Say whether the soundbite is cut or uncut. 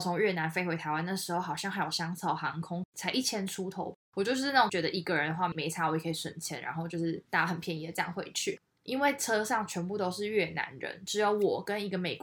uncut